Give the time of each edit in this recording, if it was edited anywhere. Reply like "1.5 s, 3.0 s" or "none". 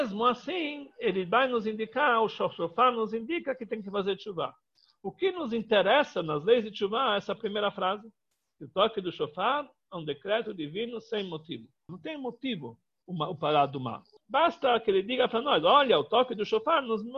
11.9 s, 14.2 s